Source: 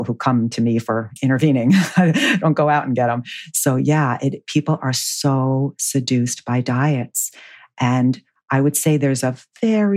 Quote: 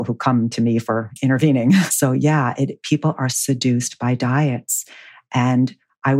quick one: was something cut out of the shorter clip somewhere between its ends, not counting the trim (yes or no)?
yes